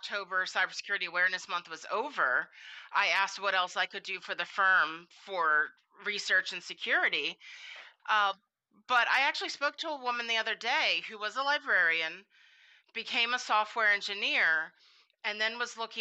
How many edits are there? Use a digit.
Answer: 1